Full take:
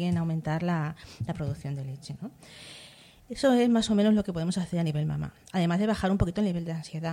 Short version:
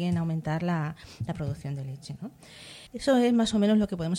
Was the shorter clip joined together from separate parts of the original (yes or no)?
yes